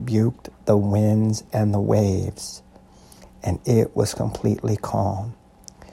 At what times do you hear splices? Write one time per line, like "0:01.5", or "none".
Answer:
none